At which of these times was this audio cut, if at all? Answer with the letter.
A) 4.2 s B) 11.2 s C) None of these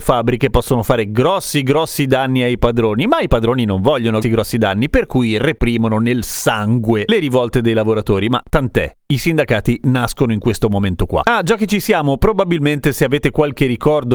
A